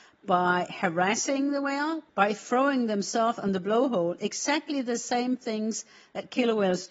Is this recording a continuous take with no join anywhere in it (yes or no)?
no